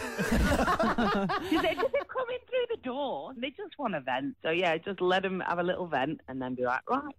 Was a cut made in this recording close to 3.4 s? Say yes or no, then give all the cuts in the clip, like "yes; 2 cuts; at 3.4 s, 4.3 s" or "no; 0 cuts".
yes; 1 cut; at 3.4 s